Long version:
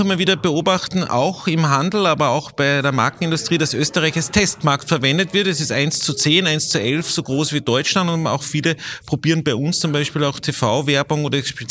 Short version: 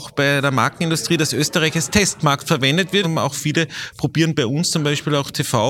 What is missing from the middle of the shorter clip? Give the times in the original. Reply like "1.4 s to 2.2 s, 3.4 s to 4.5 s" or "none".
5.4 s to 8.1 s